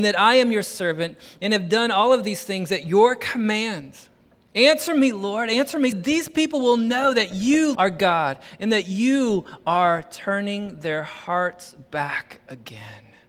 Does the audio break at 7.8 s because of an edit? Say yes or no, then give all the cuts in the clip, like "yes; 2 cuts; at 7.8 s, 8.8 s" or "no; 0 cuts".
yes; 2 cuts; at 5.9 s, 7.8 s